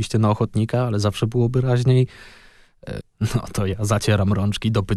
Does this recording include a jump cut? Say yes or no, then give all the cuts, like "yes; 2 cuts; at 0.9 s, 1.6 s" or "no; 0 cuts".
yes; 1 cut; at 3.0 s